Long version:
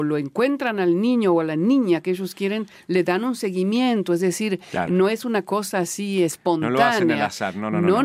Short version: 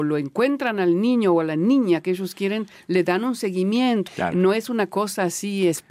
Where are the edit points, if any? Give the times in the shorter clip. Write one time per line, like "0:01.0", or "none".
0:04.1